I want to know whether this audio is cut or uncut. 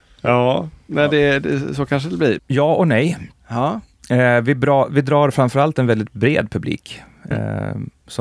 cut